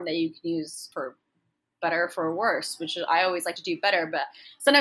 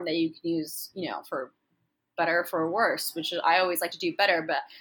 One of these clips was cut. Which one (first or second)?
first